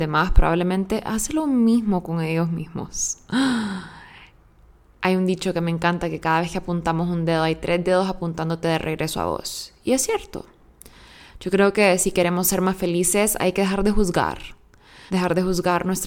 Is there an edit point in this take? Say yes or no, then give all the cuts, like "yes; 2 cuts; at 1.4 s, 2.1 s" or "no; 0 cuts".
yes; 1 cut; at 15.1 s